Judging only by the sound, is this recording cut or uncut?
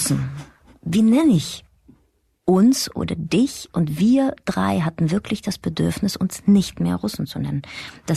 uncut